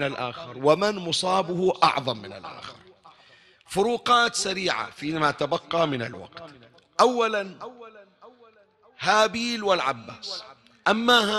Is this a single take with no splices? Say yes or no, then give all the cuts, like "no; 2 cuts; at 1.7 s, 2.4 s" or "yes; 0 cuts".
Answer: yes; 0 cuts